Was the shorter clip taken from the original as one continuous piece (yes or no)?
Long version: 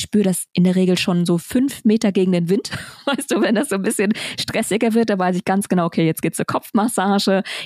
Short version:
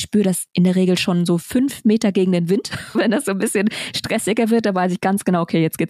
no